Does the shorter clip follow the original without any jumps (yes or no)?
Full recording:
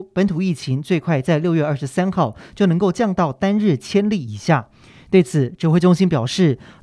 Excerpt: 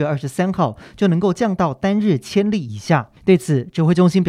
no